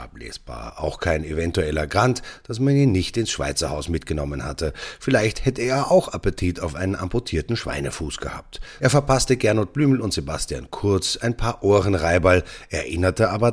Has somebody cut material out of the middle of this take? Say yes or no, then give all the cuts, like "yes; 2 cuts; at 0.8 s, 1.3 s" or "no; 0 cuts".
yes; 1 cut; at 8.8 s